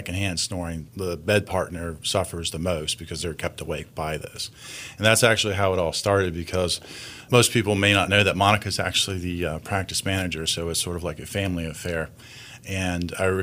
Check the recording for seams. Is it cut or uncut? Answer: uncut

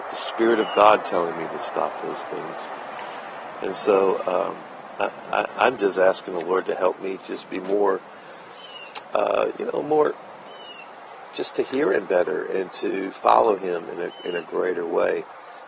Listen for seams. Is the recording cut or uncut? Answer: uncut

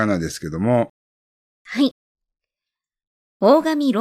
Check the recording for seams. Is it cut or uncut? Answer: cut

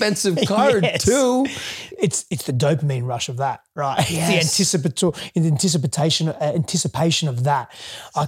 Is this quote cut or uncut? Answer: uncut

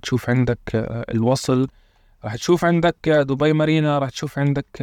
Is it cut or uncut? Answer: uncut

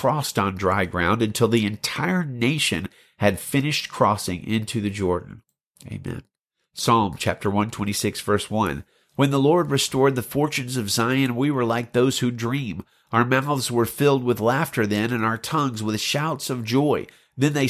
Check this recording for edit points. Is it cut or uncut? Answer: uncut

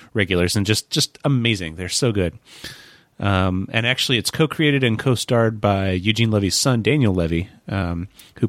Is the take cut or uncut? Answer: uncut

